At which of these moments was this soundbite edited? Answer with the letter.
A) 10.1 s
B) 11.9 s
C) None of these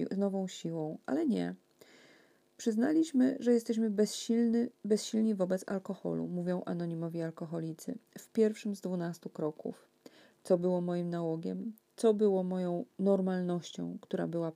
C